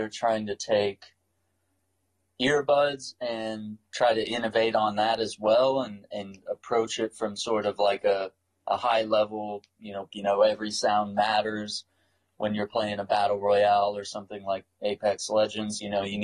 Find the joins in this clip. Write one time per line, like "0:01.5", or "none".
0:10.1